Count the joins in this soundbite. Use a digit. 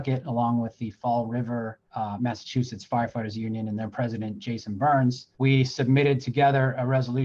2